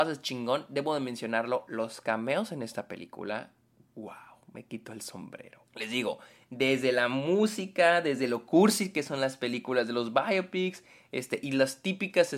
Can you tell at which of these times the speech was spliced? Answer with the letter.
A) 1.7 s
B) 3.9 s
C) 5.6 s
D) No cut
C